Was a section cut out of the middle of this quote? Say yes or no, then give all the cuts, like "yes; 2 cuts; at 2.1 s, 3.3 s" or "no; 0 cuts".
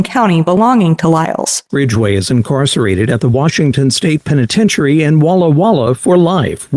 yes; 1 cut; at 1.7 s